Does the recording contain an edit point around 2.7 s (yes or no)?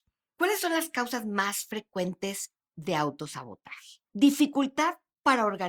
no